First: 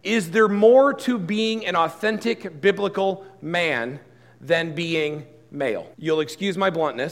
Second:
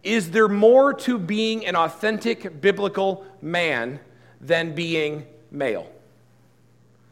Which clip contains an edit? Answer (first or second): first